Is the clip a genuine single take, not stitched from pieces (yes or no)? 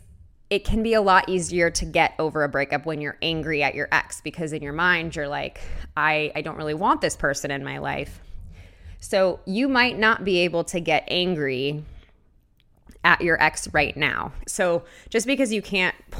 no